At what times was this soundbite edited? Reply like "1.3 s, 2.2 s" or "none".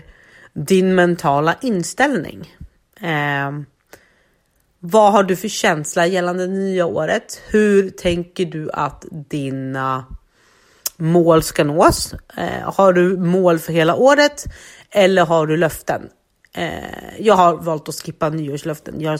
none